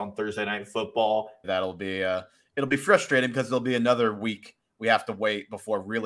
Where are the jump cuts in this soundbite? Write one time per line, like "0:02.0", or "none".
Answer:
0:01.4